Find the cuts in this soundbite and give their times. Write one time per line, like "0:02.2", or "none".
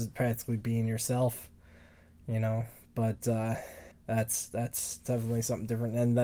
0:03.9